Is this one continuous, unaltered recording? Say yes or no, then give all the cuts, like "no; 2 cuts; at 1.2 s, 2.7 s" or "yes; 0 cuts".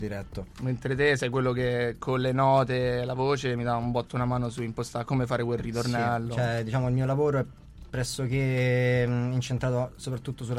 yes; 0 cuts